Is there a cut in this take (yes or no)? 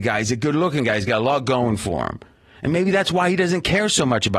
no